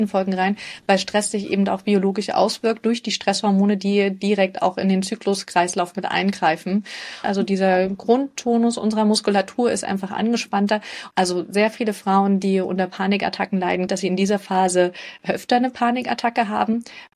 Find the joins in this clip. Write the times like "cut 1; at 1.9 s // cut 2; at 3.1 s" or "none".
cut 1; at 7.2 s // cut 2; at 11.1 s // cut 3; at 13.9 s